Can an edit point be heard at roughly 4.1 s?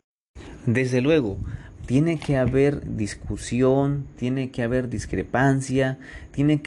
no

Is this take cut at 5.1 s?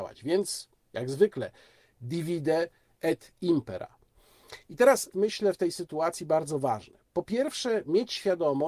yes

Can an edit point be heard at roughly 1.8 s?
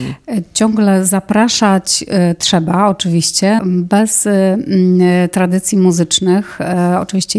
no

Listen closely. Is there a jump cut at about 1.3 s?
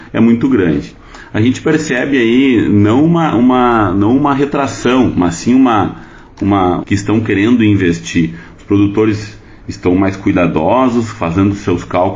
no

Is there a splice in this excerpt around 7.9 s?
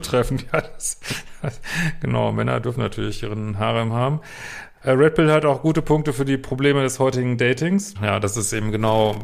yes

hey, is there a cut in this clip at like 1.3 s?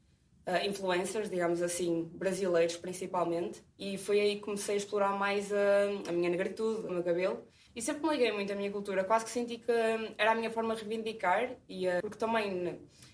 no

